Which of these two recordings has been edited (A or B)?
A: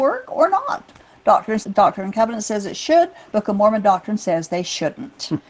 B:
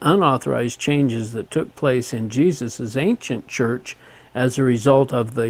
A